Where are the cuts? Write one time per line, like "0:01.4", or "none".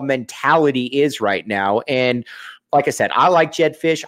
none